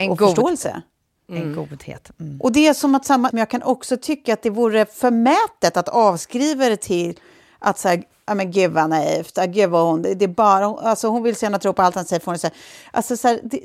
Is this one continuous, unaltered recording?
no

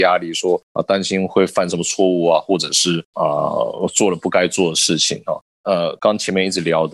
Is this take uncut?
no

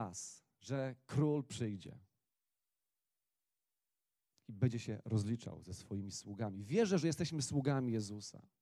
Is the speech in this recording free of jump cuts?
yes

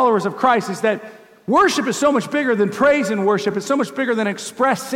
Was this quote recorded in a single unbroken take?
yes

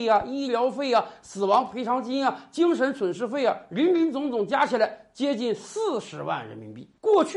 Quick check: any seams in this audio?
no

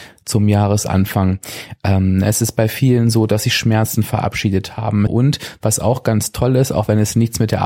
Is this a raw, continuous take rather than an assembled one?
no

